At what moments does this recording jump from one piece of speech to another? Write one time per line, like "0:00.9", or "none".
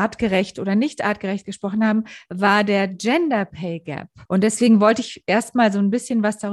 0:04.3